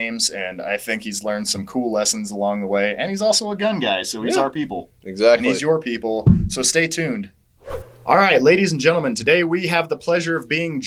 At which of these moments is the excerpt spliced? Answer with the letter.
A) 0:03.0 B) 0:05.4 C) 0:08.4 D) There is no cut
D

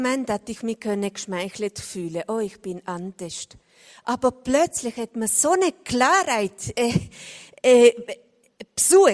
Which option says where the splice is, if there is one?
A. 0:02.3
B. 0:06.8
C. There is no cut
C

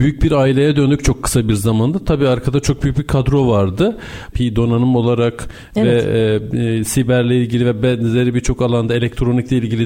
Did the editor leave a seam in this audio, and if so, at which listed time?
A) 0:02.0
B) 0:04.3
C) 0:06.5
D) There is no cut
B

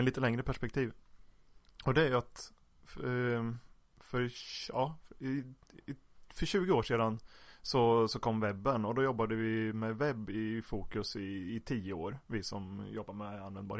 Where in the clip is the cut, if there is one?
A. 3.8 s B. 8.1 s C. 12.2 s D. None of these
D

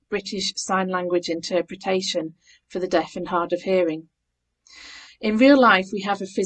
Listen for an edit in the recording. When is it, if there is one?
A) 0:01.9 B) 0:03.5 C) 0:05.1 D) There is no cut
C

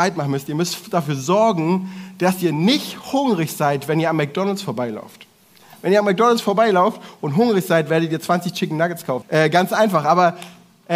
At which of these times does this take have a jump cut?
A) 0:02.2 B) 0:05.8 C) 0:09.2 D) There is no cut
C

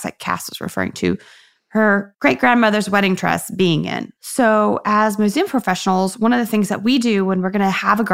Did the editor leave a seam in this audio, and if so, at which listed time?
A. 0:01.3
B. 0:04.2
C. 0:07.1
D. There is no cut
B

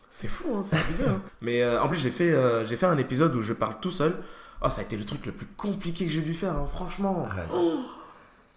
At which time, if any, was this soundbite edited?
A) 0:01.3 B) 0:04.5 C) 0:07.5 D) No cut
A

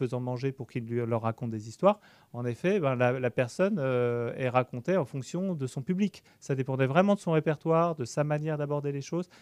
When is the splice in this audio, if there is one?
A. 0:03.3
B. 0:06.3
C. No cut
B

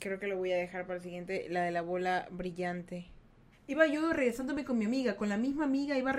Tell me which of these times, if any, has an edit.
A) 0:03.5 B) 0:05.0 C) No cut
A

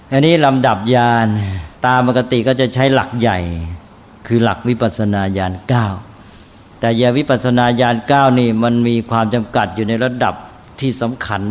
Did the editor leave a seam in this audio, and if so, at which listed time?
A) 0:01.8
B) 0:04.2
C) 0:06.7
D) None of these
A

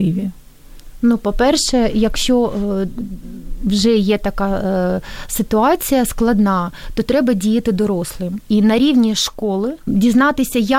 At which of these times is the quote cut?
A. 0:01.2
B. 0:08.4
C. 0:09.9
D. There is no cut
C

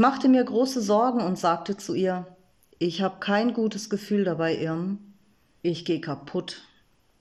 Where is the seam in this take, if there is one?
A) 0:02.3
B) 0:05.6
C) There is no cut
B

